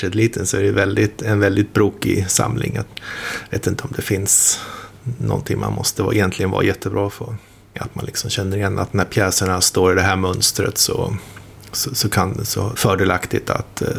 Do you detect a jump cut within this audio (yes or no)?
yes